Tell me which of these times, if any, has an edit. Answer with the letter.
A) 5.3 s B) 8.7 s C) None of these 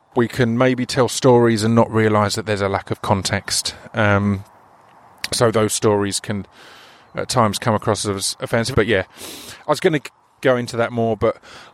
B